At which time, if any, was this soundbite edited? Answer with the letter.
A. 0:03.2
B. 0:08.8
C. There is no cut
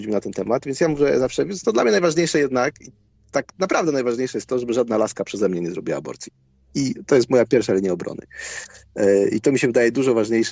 C